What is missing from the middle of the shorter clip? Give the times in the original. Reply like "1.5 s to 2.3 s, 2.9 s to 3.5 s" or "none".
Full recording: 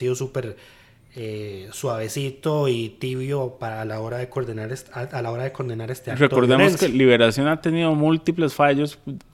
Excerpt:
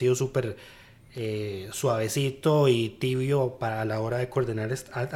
none